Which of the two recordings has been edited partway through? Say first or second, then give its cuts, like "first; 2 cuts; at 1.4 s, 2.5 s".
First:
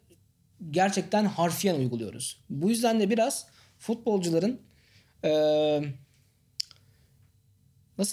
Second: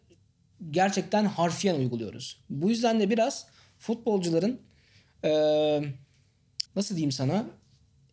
second; 1 cut; at 6.7 s